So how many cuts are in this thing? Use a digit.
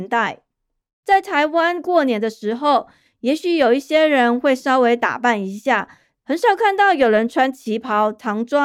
2